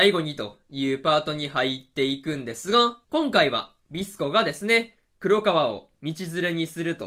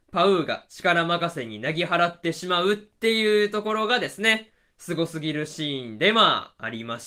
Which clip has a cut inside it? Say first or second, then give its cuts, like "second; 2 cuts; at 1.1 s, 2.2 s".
first; 1 cut; at 3.0 s